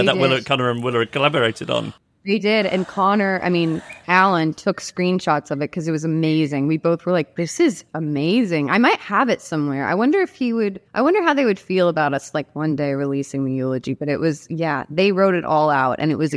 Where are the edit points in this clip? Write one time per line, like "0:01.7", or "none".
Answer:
0:10.9

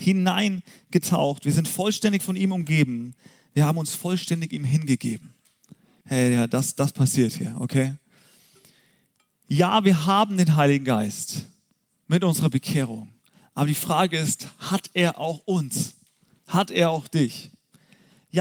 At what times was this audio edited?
0:06.0

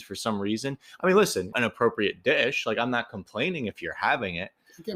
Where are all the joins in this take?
0:01.5

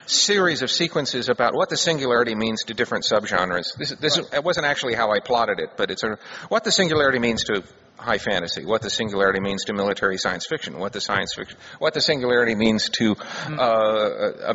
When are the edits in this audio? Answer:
none

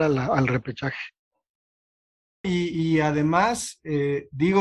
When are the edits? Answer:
0:02.4

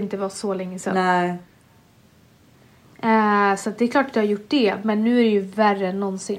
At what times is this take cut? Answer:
none

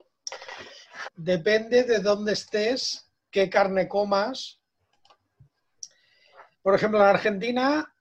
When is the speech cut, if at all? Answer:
0:01.1
0:03.2

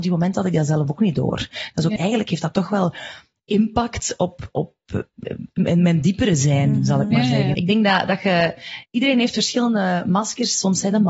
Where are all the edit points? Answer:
0:02.0
0:07.5

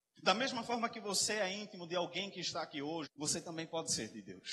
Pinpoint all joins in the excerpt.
0:03.1

